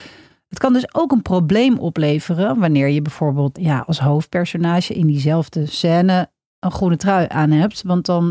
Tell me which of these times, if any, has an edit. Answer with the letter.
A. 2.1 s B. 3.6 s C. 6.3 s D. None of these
B